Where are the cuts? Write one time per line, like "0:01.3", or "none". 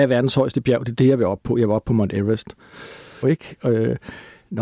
0:03.2